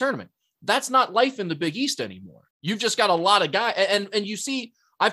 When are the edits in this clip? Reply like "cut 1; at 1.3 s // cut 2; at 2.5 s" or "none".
cut 1; at 2.5 s